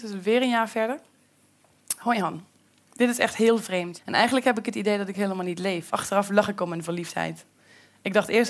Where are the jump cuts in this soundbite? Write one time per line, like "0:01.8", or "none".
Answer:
0:04.0
0:05.9